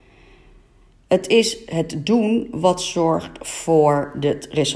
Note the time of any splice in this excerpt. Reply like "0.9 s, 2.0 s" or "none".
none